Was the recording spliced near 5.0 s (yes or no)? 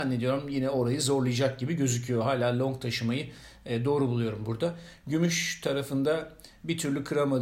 no